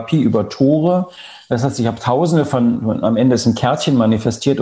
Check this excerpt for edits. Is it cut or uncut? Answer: uncut